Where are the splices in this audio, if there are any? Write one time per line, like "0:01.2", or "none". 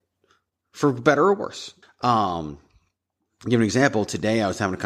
0:01.8